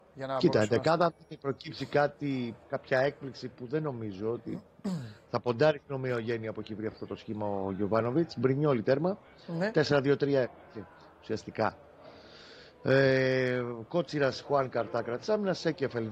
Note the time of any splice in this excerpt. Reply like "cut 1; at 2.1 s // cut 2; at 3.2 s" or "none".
none